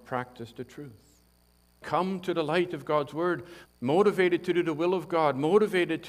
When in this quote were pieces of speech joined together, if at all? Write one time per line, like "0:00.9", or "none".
0:01.8
0:03.7